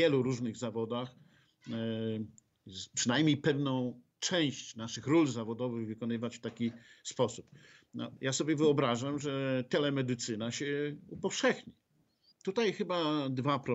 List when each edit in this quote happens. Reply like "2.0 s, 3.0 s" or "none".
8.2 s, 12.3 s